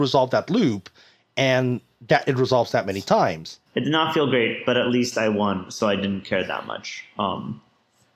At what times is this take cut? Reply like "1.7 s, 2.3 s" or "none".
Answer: 3.7 s